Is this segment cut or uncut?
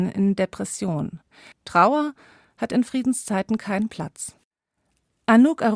cut